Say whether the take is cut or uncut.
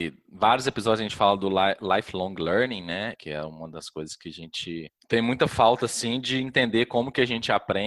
cut